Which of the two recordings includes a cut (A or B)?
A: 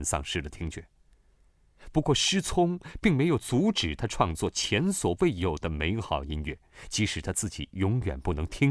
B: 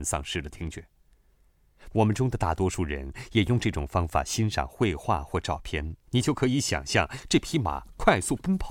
B